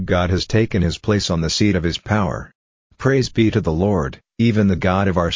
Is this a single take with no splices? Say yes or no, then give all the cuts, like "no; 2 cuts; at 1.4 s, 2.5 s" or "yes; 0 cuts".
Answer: no; 1 cut; at 4.3 s